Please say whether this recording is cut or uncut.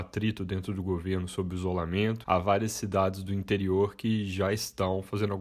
cut